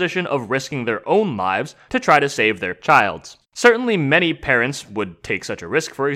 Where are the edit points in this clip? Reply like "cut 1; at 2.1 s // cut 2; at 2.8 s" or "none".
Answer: cut 1; at 3.4 s

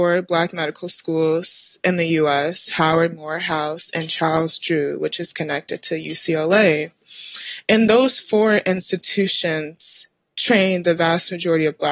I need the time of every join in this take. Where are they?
cut 1; at 3.1 s

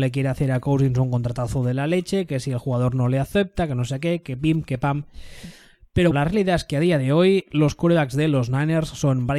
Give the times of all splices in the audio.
cut 1; at 6.1 s

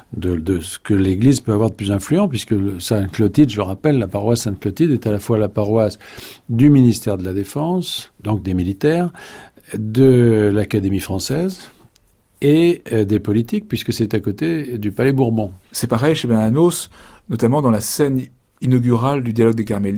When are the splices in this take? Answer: cut 1; at 15.6 s

